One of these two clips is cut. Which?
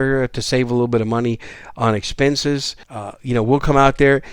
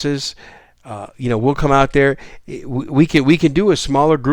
first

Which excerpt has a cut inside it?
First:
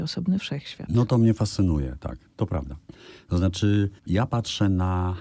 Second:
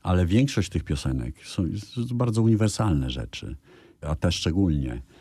first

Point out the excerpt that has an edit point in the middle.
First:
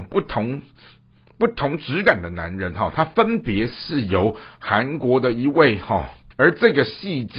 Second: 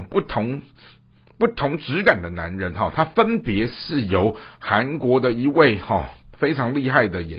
first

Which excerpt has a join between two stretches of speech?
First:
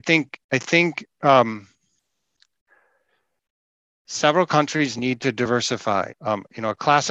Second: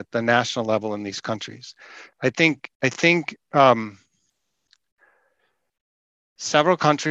first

